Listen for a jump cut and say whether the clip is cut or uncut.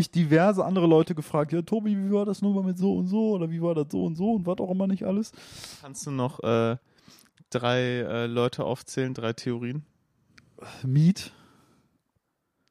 uncut